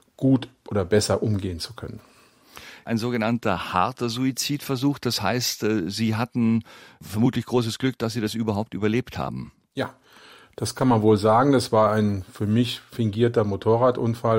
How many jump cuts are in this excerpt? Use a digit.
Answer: 0